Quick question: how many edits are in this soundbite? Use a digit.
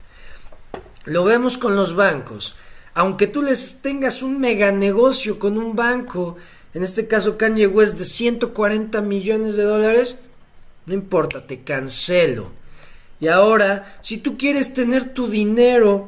0